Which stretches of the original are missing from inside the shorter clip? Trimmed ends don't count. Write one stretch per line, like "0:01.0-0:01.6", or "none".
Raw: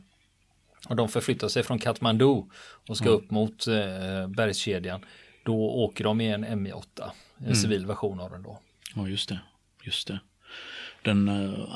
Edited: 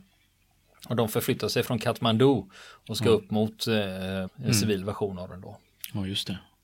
0:04.3-0:07.3

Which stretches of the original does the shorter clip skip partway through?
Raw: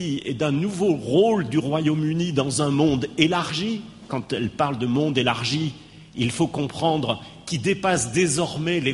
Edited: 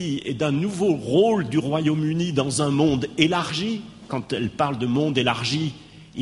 none

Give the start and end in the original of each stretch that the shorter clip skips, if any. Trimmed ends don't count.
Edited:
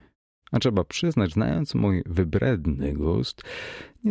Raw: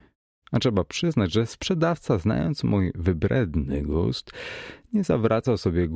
0:01.3-0:02.2

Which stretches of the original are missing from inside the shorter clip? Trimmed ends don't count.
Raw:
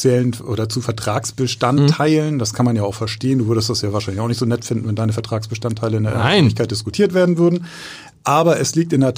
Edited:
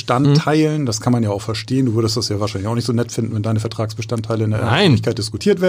none

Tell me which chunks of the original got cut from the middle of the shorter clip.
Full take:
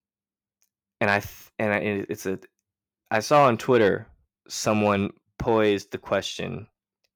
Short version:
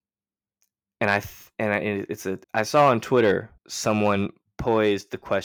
0:02.4-0:03.0
0:04.1-0:04.4

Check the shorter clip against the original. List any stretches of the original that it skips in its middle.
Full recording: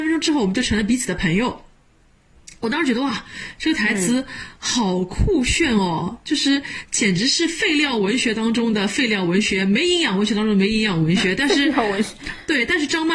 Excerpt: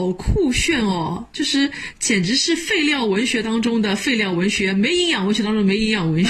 none

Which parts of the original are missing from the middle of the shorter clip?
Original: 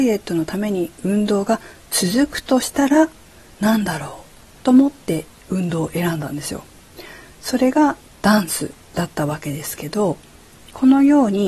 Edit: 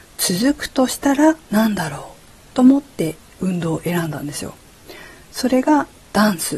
0:03.2-0:03.5

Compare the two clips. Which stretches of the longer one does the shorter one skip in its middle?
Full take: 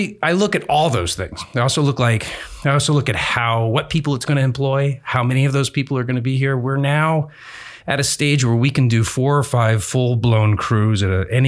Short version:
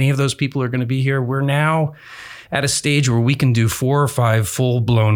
none

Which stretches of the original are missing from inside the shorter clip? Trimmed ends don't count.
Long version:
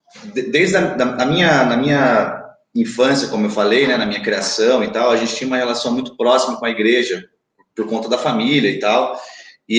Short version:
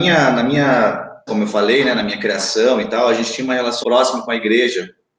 0:02.6-0:03.3
0:05.8-0:06.2

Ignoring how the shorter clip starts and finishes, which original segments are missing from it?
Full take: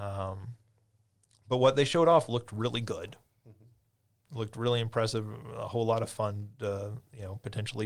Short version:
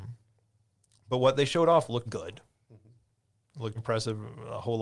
0:02.4-0:02.8
0:04.5-0:04.8

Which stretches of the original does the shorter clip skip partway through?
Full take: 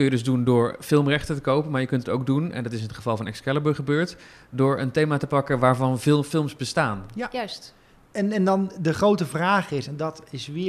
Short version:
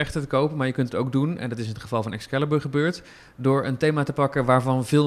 none

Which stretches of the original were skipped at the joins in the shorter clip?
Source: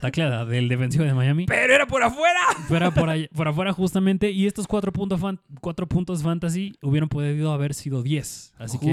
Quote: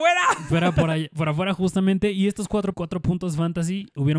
0:04.9-0:05.6

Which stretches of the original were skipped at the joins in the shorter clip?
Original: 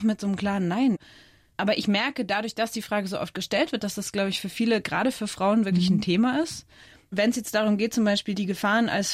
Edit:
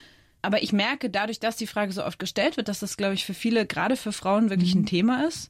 none

